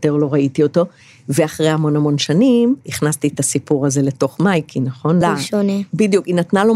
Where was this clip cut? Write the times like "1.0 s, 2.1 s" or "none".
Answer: 2.8 s, 5.2 s